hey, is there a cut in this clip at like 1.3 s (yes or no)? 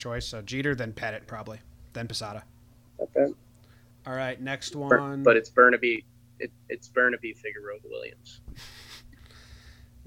no